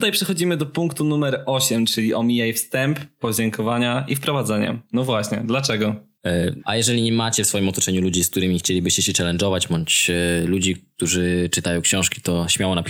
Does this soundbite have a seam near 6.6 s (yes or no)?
yes